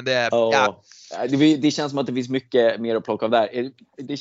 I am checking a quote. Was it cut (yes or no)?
no